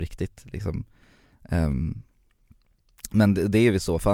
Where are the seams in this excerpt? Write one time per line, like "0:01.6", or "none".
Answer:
none